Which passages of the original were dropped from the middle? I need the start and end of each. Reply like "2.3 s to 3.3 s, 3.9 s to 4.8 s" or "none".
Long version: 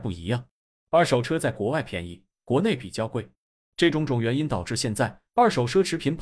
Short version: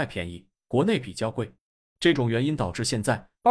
3.9 s to 4.1 s